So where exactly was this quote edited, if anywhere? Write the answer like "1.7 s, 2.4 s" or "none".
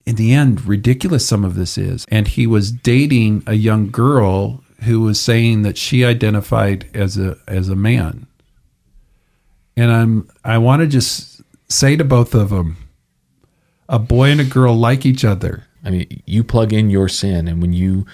2.0 s, 15.8 s